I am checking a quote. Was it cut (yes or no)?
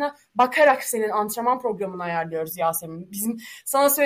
no